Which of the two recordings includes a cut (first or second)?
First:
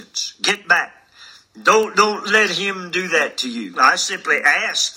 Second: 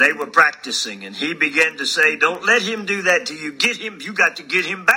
first